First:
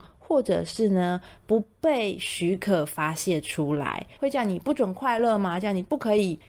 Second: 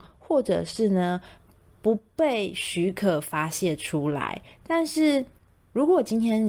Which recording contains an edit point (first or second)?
first